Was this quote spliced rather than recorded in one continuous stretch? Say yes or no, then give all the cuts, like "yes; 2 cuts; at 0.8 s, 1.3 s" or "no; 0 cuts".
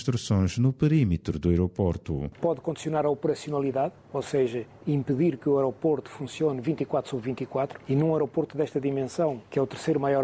yes; 1 cut; at 2.3 s